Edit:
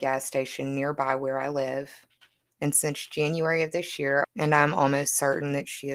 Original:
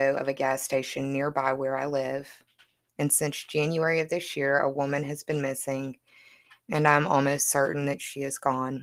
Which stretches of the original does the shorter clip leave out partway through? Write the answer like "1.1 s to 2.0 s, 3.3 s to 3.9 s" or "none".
4.6 s to 6.6 s